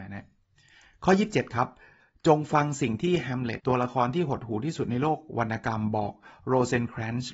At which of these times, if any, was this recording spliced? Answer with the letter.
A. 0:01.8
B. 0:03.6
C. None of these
B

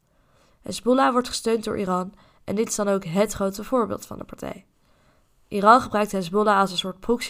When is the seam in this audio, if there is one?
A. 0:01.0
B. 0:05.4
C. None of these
C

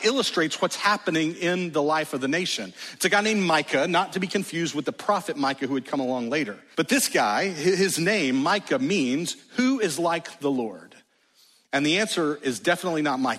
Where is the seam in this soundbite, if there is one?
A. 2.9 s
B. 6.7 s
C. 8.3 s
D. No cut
B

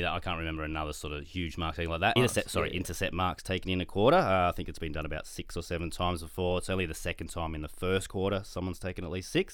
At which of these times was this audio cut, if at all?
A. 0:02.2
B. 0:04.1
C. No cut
A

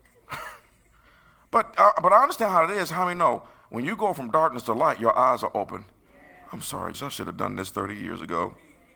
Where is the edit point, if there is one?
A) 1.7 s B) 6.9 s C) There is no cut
B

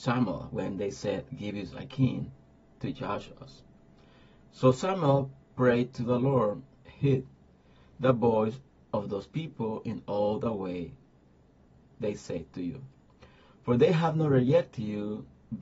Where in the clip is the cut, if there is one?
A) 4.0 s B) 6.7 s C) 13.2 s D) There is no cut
B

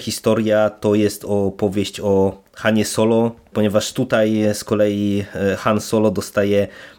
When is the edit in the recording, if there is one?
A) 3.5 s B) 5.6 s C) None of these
A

